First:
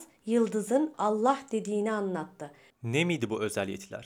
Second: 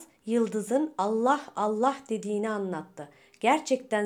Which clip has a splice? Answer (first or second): first